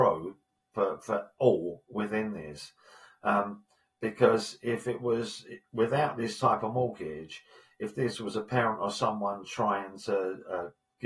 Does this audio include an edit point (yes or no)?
no